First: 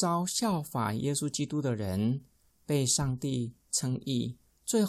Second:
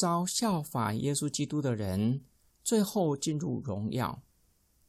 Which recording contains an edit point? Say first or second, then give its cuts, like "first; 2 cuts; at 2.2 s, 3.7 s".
second; 1 cut; at 2.5 s